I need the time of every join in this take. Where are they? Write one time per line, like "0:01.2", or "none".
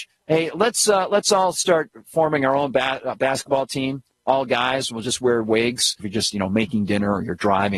0:06.0

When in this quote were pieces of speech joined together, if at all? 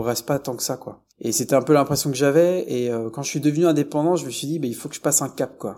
0:01.1

